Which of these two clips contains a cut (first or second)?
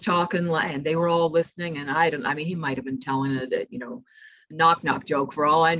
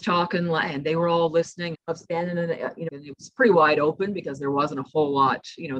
second